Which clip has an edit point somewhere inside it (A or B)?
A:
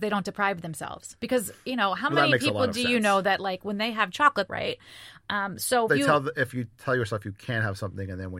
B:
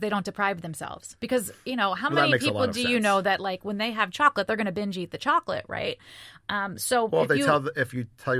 A